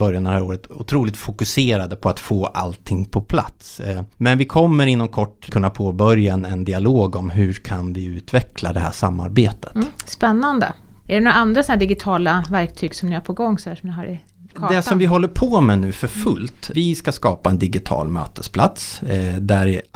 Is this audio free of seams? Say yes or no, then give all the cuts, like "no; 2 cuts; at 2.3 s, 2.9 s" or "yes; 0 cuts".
no; 2 cuts; at 5.5 s, 16.7 s